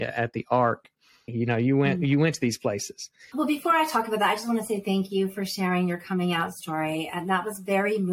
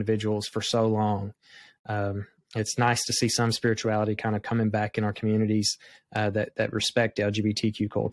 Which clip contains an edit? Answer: first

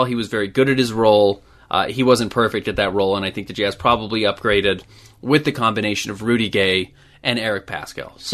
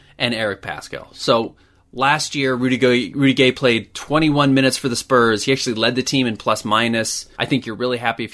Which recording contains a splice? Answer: second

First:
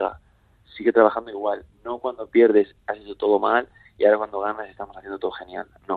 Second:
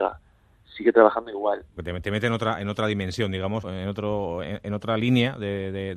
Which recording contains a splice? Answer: second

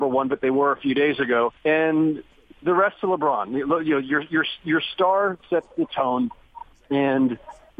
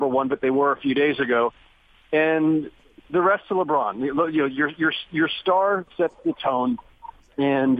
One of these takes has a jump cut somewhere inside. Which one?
first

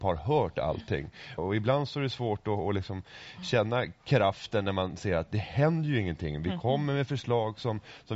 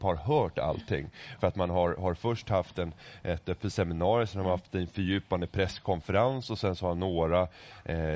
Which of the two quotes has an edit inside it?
first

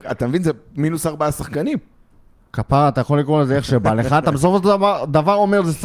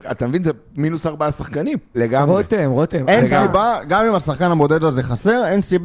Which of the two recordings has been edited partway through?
second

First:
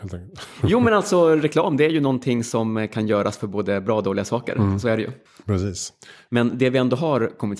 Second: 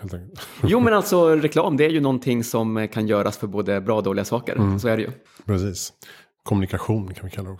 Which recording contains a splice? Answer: first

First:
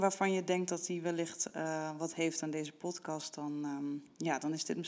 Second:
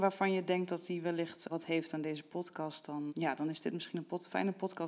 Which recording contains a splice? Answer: second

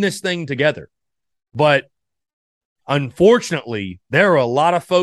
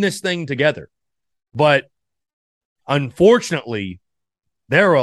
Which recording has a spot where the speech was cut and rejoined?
first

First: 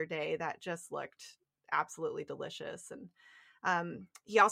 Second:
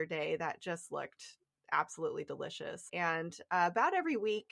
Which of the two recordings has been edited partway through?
second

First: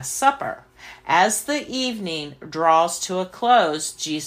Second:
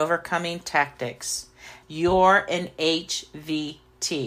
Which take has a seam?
second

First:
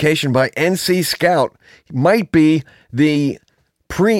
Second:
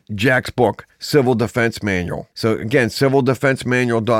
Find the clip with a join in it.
second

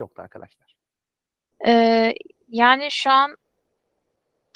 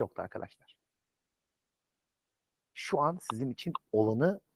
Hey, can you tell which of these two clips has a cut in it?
first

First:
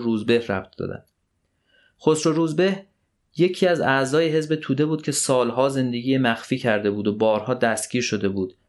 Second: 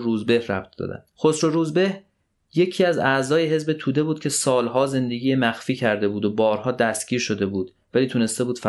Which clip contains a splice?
second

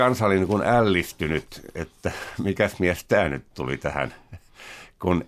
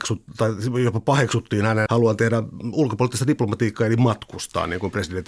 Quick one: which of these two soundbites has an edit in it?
second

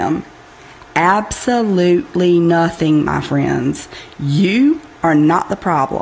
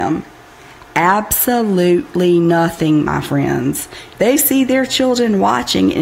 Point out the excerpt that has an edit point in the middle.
second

